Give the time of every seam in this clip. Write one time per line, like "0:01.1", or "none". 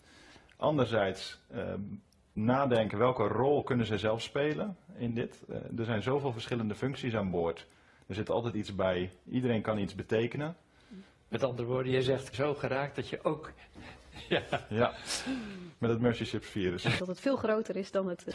0:12.3
0:17.0